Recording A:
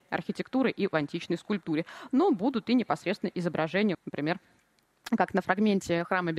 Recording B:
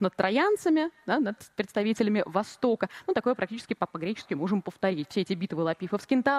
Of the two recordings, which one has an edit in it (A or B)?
A